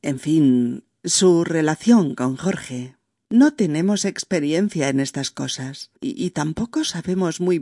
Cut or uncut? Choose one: cut